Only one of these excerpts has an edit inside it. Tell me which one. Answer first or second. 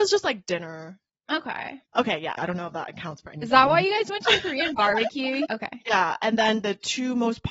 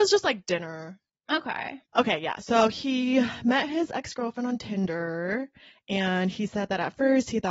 first